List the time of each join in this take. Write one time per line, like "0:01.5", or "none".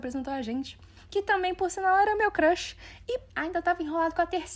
0:03.3